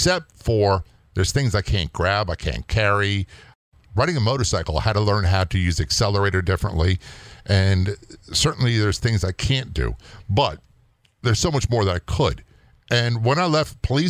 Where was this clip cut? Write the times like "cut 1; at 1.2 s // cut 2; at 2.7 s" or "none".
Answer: none